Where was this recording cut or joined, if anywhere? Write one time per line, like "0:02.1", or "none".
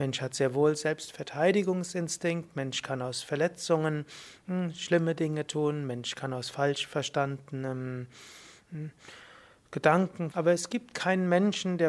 0:10.3